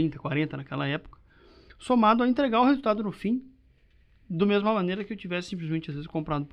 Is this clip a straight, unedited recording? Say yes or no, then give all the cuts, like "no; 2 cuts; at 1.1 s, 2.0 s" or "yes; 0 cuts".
yes; 0 cuts